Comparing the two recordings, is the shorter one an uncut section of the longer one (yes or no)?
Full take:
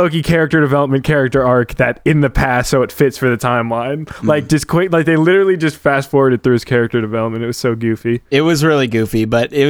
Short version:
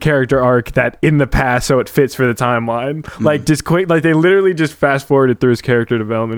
yes